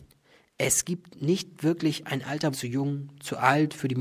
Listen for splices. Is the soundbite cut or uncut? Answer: cut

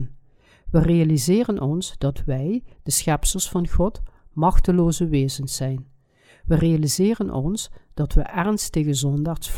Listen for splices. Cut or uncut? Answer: uncut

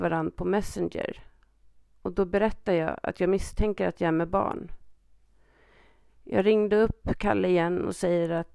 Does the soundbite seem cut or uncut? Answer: cut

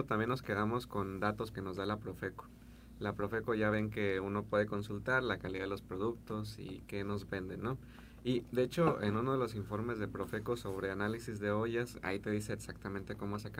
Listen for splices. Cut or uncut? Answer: cut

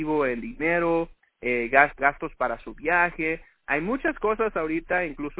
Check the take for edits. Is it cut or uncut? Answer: cut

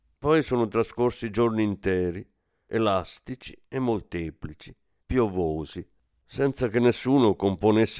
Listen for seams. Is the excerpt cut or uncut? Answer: uncut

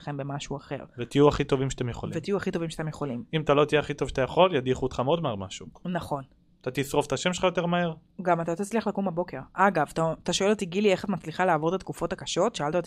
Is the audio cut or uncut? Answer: uncut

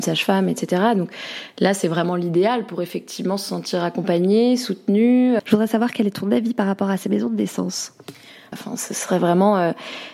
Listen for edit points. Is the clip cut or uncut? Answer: cut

